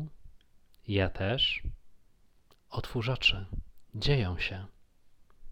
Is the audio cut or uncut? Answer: uncut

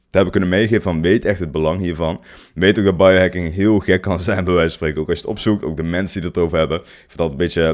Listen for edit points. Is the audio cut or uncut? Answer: uncut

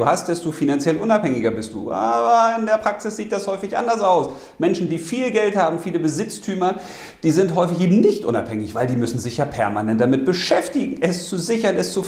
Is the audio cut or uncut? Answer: uncut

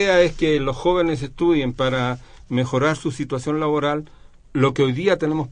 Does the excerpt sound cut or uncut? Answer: uncut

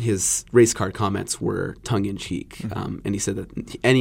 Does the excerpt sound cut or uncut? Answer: uncut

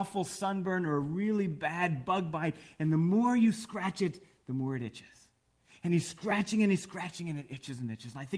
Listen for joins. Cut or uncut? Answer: uncut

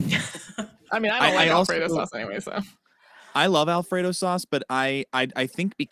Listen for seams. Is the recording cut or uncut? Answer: uncut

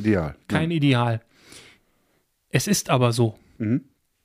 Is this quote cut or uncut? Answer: uncut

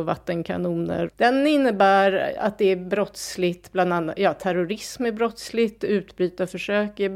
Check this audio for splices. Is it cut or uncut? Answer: cut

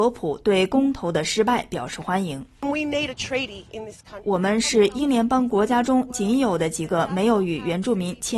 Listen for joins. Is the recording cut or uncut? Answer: cut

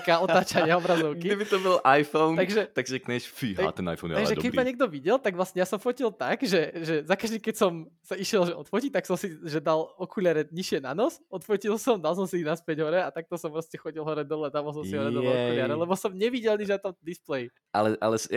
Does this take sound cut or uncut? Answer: uncut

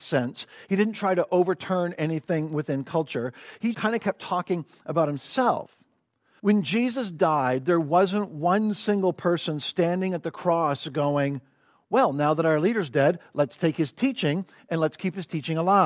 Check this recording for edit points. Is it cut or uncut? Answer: cut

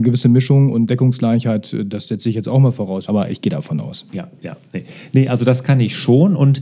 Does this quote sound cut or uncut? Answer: cut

